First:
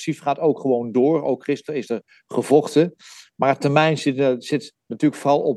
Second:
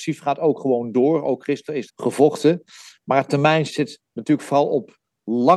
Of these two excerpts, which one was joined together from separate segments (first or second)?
second